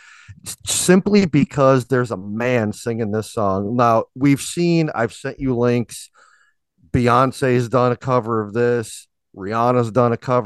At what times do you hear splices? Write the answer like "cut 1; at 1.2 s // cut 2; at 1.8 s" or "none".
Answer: none